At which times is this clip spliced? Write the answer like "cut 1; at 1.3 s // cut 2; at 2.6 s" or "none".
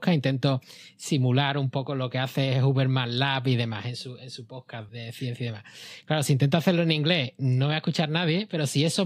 cut 1; at 4.9 s